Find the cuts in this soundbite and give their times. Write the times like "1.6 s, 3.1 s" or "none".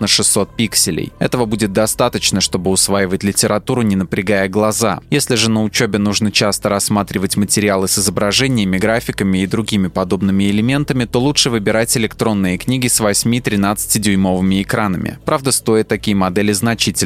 none